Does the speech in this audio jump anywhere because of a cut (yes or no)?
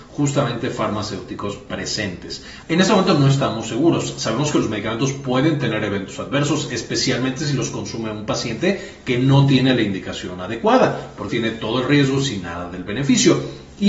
yes